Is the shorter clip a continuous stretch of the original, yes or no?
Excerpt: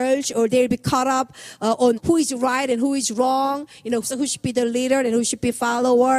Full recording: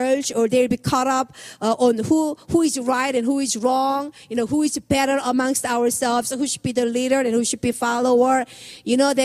no